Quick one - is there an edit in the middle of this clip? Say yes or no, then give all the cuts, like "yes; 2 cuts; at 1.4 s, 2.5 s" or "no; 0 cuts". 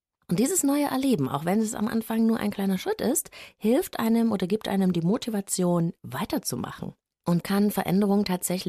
yes; 1 cut; at 7.4 s